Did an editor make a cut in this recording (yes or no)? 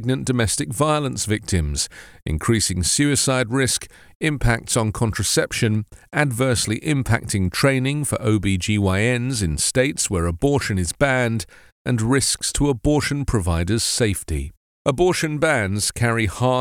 no